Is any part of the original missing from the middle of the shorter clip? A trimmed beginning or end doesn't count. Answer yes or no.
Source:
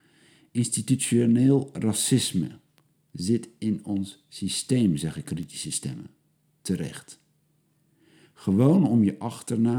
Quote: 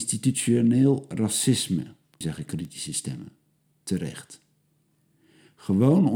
yes